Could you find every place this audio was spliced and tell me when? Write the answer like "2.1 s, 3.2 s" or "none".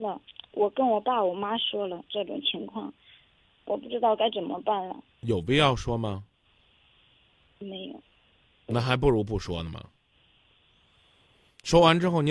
7.5 s